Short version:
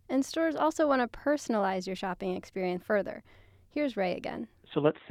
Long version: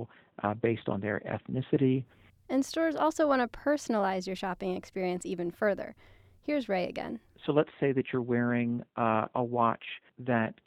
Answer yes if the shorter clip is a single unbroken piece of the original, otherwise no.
no